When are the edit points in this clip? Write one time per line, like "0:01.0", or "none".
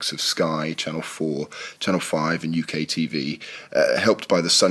none